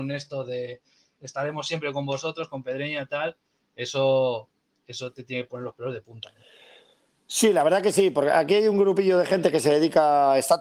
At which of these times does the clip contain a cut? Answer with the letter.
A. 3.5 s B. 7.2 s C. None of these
C